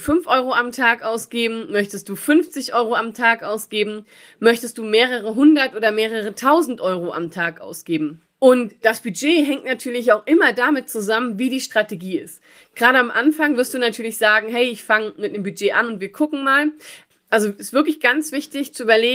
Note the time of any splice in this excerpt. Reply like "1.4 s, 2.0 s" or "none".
8.3 s, 17.1 s